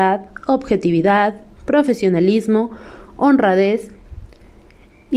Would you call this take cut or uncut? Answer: cut